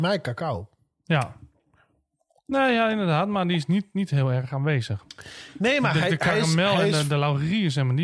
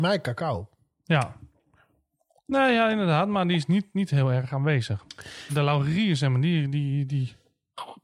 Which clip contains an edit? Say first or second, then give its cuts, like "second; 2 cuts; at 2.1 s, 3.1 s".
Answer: second; 1 cut; at 5.5 s